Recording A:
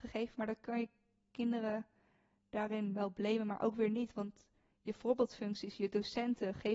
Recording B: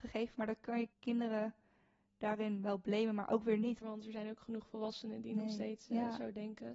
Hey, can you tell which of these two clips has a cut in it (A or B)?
B